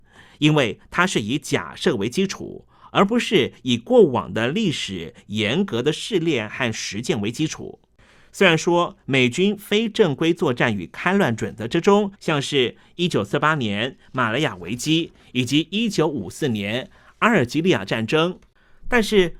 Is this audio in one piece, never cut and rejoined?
no; 1 cut; at 12.1 s

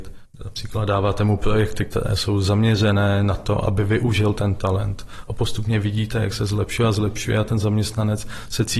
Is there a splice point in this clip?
no; 0 cuts

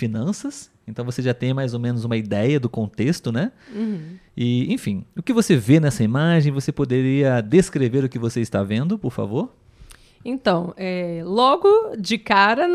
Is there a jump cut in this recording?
no; 0 cuts

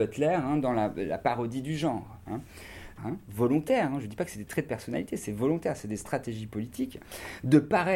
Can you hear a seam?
yes; 1 cut; at 3.0 s

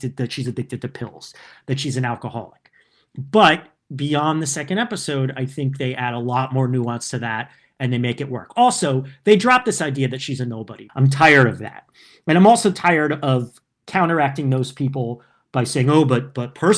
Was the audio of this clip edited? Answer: yes; 1 cut; at 10.9 s

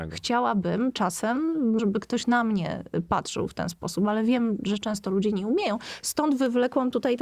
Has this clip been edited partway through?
yes; 1 cut; at 1.8 s

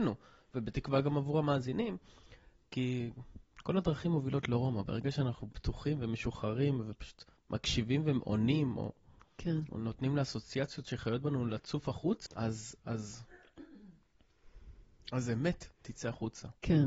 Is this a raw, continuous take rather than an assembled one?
no; 1 cut; at 12.3 s

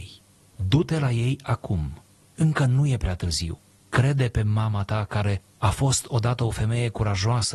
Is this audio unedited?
no; 1 cut; at 3.7 s

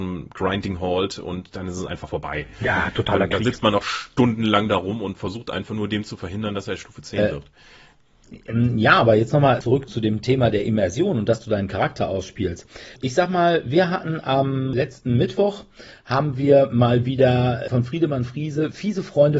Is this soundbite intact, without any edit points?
yes; 0 cuts

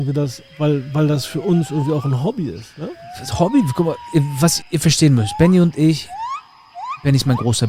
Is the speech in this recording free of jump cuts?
no; 1 cut; at 4.6 s

